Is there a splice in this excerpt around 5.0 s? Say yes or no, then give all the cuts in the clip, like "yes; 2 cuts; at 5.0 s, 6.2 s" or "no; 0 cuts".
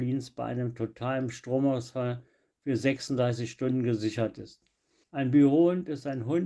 yes; 1 cut; at 5.0 s